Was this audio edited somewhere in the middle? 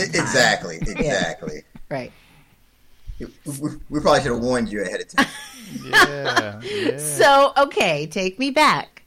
no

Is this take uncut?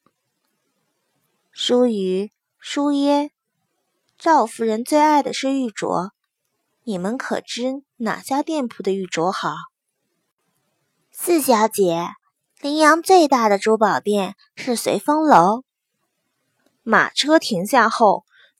no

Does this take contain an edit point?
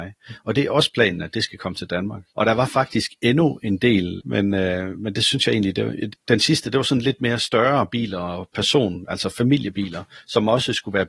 yes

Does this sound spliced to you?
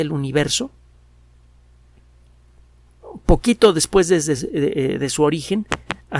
no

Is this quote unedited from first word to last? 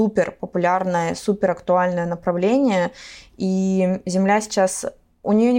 yes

